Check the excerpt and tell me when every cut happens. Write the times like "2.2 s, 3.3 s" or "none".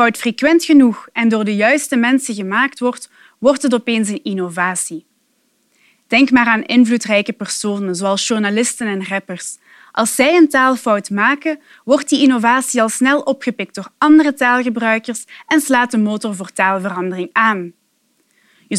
none